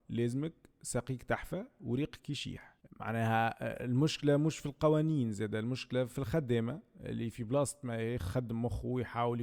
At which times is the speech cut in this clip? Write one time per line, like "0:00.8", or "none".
none